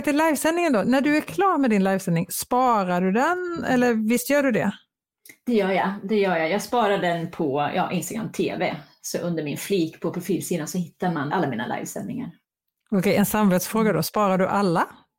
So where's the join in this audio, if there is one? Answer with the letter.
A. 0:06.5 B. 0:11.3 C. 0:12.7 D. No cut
B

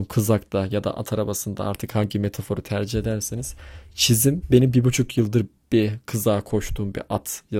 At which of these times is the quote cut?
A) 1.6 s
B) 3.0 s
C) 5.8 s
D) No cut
D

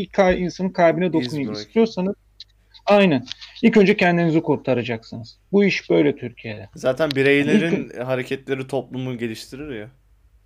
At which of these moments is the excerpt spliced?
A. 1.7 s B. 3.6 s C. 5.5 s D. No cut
D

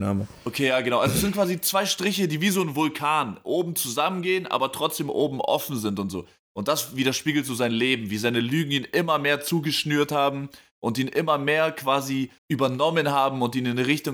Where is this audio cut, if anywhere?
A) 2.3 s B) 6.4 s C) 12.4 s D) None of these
C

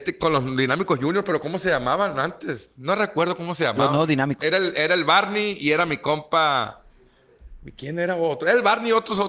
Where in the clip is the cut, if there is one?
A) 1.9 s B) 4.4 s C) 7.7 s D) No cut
B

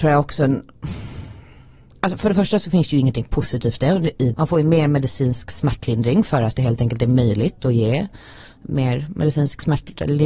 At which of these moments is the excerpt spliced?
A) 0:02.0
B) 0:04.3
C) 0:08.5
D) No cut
B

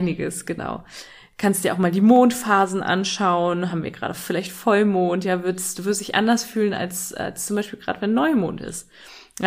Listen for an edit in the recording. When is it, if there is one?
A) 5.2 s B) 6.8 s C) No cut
C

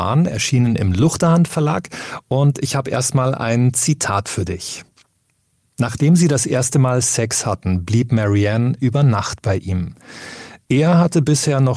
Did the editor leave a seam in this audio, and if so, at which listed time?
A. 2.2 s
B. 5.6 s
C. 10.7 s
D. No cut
D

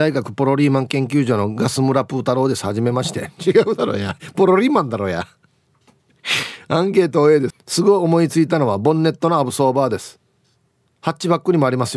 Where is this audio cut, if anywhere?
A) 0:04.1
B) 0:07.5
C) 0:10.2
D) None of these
B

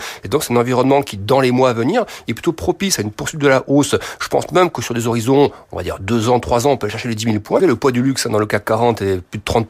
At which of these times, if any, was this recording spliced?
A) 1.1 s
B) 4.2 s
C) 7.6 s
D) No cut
C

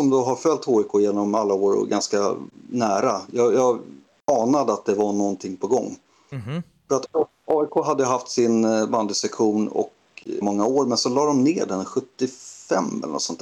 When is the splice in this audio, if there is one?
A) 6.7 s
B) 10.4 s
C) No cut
B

